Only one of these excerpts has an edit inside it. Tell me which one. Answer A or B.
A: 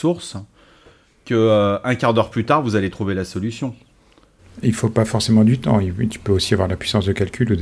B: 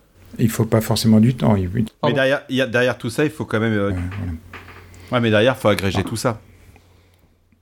B